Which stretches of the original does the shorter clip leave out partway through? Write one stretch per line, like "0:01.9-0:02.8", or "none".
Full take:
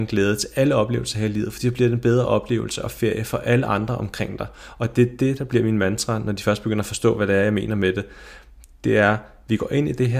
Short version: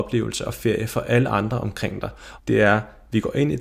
0:04.7-0:08.7